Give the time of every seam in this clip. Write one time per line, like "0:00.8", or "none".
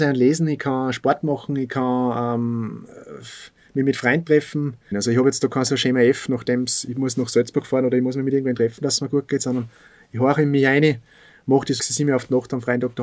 0:04.9
0:11.8

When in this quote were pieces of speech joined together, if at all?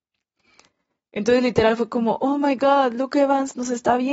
none

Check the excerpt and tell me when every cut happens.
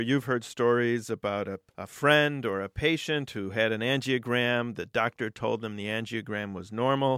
0:01.7

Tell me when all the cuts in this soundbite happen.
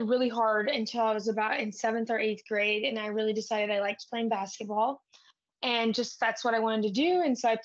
none

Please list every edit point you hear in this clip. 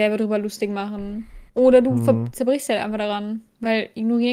0:01.5

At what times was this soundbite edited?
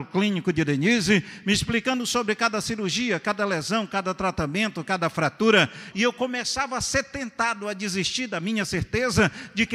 0:05.9

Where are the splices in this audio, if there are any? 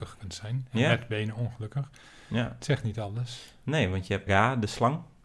0:04.3

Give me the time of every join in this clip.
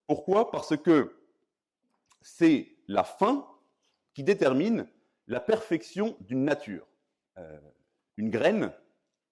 0:07.2

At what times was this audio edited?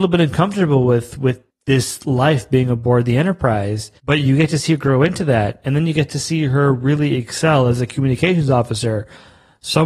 0:04.0

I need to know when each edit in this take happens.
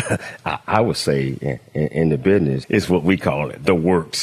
0:02.6

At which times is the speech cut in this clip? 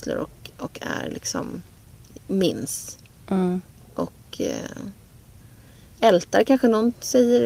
none

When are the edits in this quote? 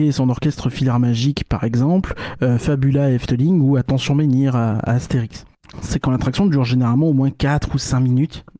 0:05.7

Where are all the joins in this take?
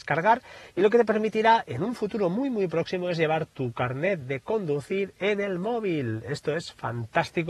none

